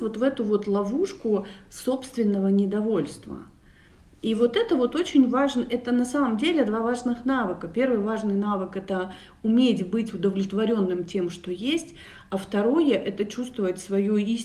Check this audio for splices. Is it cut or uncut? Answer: uncut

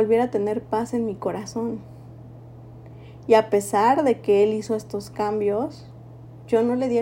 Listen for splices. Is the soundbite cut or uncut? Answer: uncut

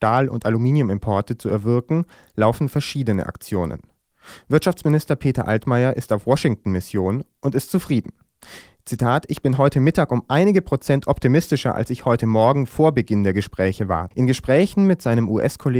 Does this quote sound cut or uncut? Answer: cut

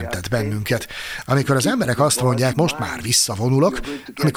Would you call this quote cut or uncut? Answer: cut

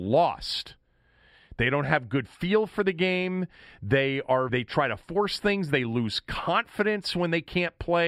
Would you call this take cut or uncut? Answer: cut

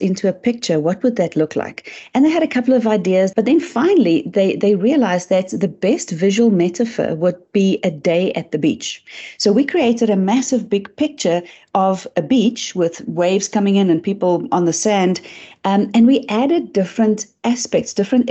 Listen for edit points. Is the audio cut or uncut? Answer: cut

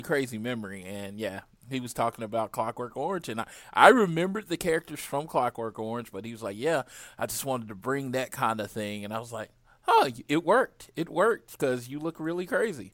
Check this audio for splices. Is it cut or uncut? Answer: uncut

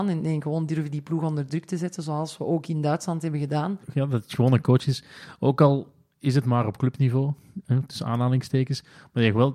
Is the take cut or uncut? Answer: cut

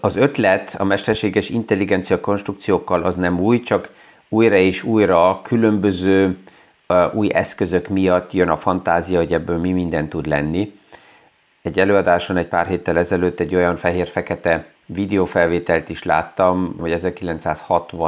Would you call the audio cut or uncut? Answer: cut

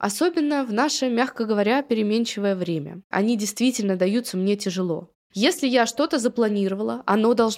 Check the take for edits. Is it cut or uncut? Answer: cut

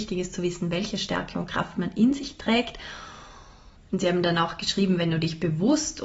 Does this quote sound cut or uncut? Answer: cut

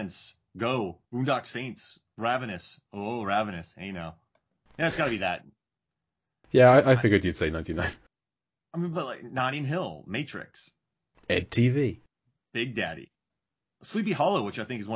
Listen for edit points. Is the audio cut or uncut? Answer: cut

